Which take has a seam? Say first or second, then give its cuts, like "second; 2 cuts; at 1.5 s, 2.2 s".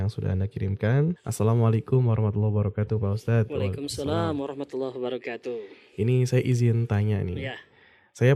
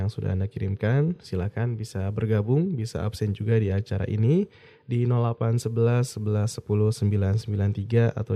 first; 1 cut; at 1.2 s